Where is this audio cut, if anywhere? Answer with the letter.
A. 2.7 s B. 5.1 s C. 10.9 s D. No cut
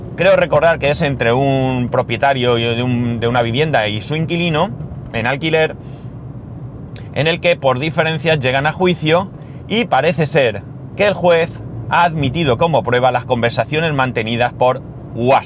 C